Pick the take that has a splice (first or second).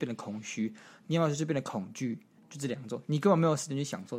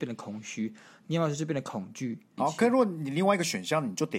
second